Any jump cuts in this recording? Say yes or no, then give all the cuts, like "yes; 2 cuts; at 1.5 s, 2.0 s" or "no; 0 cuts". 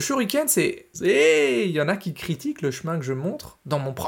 yes; 1 cut; at 0.9 s